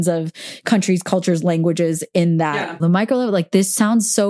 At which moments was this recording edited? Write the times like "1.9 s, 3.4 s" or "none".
2.8 s